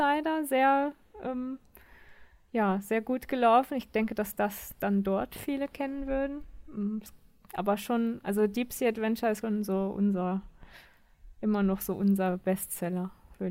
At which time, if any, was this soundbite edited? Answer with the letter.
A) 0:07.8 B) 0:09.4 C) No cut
B